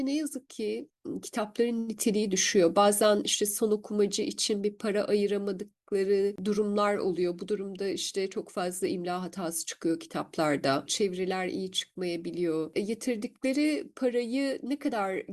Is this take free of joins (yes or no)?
no